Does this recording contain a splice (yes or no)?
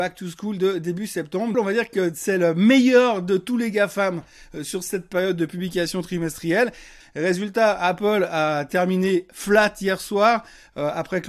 yes